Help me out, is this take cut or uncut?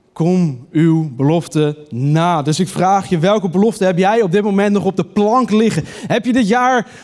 uncut